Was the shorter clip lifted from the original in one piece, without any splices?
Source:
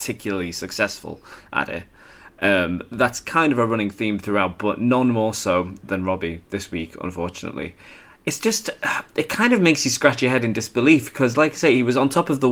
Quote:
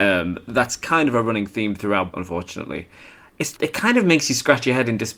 no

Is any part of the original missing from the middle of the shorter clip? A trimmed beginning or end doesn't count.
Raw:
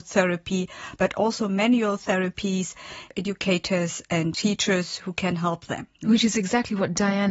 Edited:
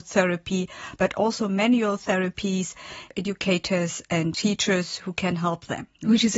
no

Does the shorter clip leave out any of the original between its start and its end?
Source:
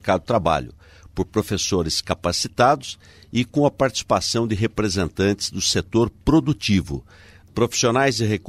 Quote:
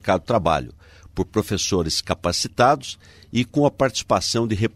no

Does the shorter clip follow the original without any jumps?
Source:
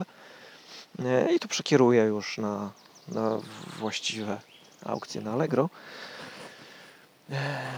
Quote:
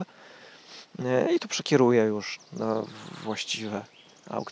no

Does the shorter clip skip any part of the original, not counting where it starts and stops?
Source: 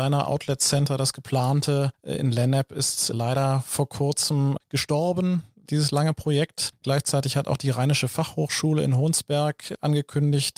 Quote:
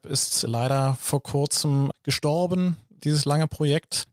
no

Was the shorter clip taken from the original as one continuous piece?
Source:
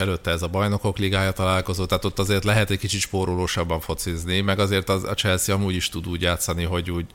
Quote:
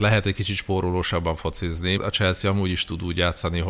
no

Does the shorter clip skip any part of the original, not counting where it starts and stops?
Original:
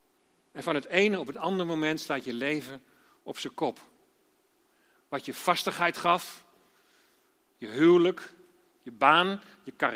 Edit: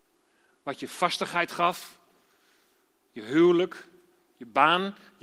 no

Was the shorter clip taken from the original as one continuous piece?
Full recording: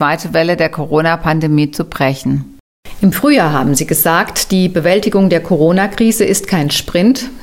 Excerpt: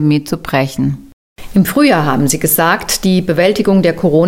yes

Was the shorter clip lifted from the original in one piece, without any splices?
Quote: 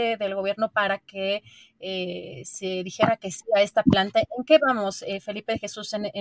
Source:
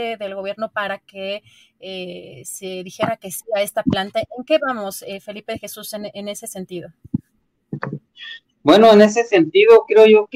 yes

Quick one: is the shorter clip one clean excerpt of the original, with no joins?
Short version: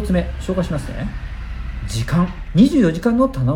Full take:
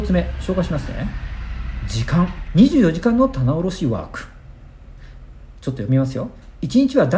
yes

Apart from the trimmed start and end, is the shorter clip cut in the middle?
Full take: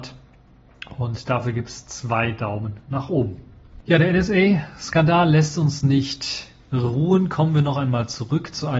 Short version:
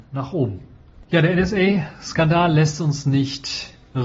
no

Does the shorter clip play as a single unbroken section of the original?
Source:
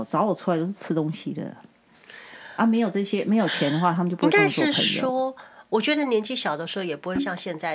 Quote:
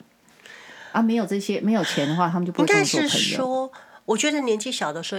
yes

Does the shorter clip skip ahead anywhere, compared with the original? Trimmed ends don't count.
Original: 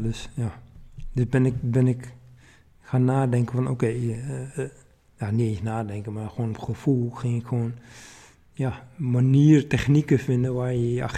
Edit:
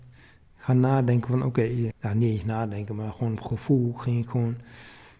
yes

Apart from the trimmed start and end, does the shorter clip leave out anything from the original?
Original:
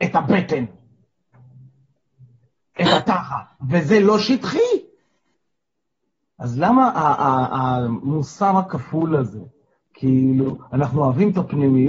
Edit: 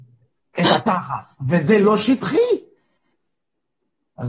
no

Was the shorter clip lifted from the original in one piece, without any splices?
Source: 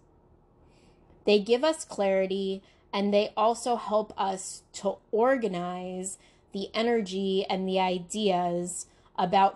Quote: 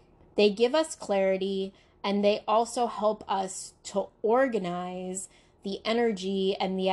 yes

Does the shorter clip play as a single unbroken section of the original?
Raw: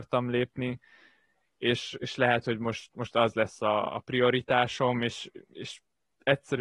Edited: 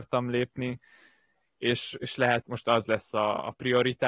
no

